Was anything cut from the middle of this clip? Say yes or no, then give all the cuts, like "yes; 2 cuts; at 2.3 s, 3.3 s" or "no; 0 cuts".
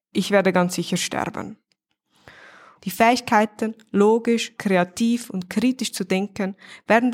yes; 2 cuts; at 2.8 s, 4.6 s